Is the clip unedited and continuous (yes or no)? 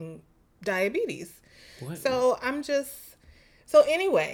yes